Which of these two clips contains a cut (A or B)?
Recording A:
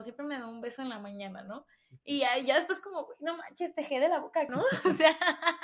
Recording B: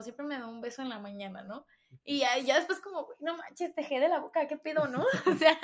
A